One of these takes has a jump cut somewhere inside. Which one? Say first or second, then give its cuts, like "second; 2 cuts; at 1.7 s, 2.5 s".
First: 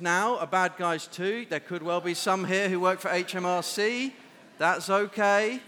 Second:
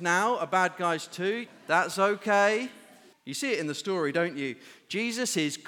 second; 2 cuts; at 1.5 s, 3.1 s